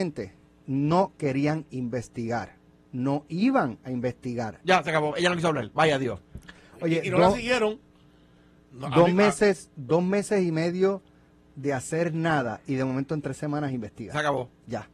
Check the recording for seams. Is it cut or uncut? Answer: cut